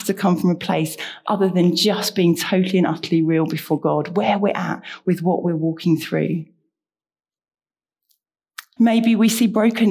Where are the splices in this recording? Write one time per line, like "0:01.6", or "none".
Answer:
0:08.8